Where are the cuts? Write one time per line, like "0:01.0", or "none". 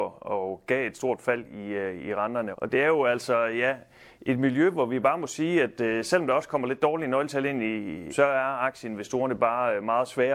0:02.5
0:08.1